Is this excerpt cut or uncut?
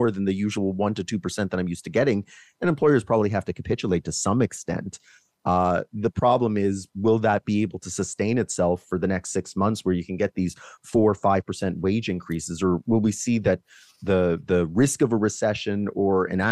uncut